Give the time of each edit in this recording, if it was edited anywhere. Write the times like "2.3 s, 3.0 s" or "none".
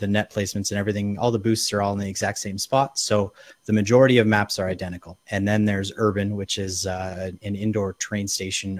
5.2 s

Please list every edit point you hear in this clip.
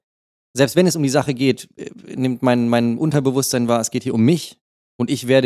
none

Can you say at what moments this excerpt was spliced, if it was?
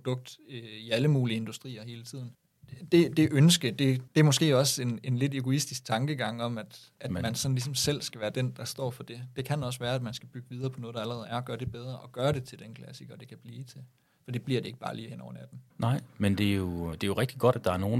15.7 s, 16.9 s

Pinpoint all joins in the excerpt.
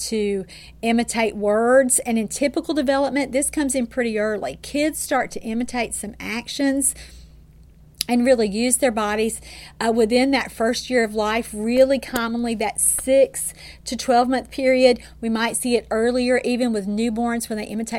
none

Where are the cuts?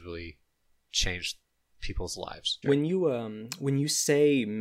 2.6 s

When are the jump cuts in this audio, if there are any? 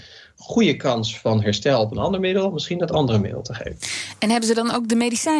none

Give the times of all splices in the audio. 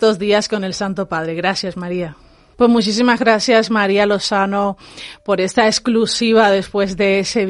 2.5 s

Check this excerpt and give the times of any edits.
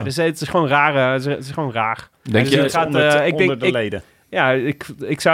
none

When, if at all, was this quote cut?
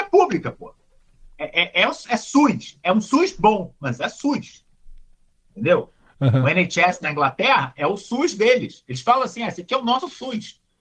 none

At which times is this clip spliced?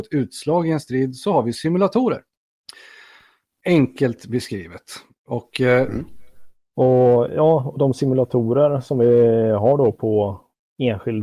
6.7 s

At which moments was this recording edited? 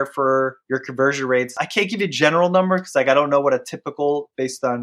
1.5 s

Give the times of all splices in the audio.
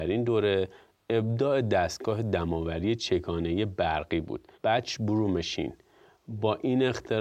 4.5 s

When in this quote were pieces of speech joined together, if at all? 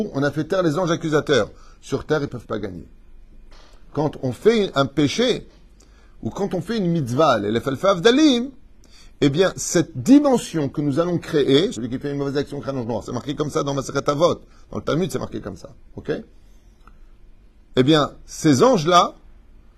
11.7 s

